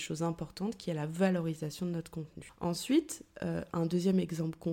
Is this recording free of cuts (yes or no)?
yes